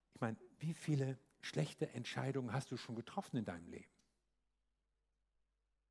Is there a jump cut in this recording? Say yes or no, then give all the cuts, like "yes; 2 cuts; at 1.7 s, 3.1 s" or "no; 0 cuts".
no; 0 cuts